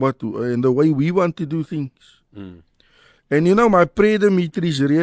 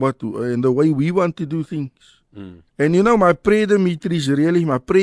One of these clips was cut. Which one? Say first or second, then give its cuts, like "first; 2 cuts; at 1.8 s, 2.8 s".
second; 1 cut; at 2.7 s